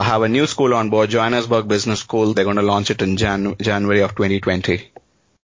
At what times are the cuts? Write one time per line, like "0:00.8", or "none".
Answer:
0:02.3